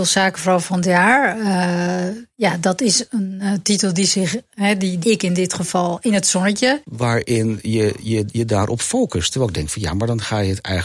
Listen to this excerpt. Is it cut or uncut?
cut